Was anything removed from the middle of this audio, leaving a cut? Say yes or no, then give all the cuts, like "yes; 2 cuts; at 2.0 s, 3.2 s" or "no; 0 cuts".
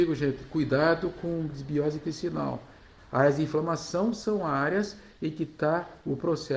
yes; 1 cut; at 3.0 s